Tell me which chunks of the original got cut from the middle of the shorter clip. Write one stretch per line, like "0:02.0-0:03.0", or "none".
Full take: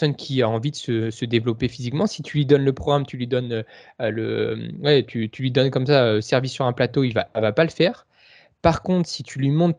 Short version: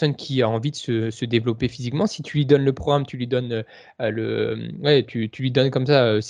none